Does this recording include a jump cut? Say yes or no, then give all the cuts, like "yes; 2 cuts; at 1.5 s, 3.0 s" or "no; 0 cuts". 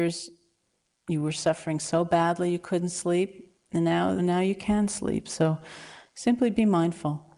yes; 1 cut; at 4.2 s